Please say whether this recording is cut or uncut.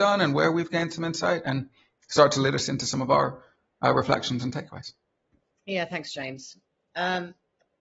uncut